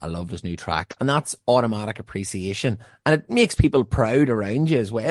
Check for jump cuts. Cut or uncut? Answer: uncut